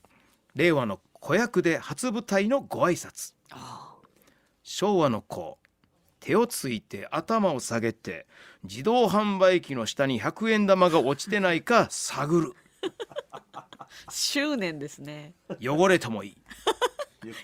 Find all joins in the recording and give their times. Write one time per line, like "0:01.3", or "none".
0:01.0